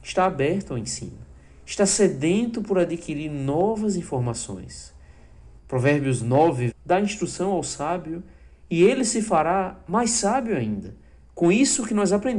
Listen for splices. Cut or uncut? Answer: cut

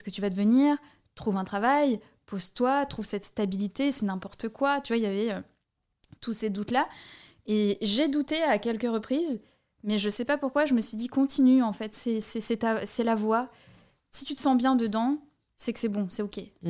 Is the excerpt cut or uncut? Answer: uncut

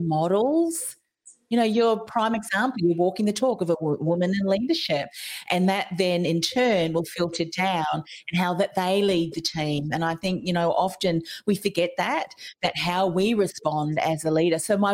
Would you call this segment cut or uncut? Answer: uncut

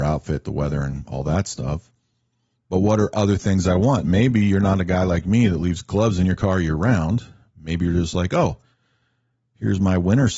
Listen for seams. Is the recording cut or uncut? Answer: uncut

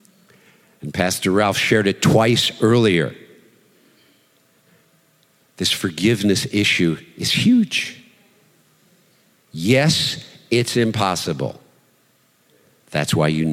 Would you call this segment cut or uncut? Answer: uncut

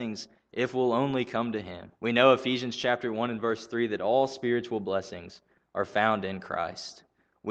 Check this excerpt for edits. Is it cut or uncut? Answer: cut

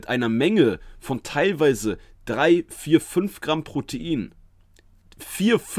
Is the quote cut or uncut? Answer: uncut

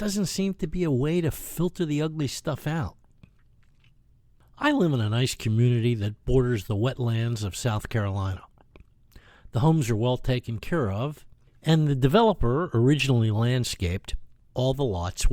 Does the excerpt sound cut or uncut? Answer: uncut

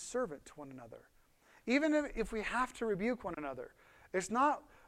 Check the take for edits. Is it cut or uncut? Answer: uncut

